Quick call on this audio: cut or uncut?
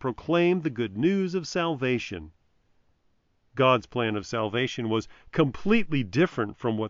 uncut